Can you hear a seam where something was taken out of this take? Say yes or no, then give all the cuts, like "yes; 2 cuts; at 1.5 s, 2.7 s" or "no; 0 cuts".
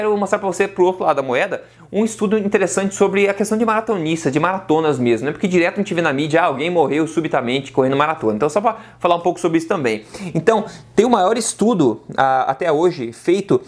no; 0 cuts